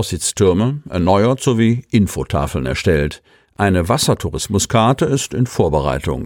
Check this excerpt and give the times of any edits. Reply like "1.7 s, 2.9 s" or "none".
none